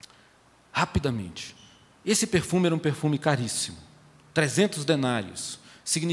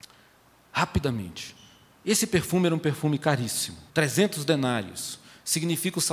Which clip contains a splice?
second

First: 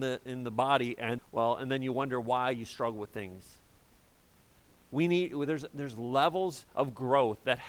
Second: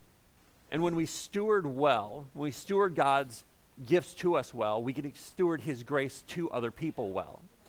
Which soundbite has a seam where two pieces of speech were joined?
first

